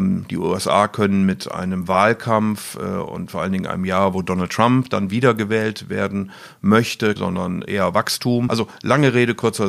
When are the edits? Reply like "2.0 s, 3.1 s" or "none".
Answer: 7.2 s, 8.5 s